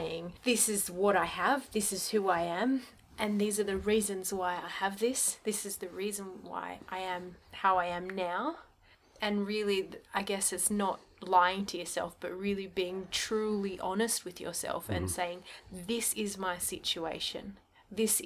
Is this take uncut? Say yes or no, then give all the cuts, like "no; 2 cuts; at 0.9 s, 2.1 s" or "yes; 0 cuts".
yes; 0 cuts